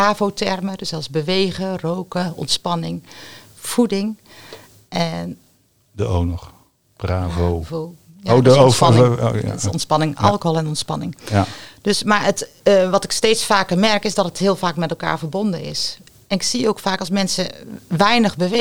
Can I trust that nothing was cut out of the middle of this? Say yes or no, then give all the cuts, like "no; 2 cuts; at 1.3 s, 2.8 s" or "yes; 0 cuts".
yes; 0 cuts